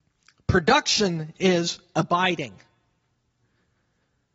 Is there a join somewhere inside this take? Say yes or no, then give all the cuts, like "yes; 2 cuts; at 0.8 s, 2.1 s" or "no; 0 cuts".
no; 0 cuts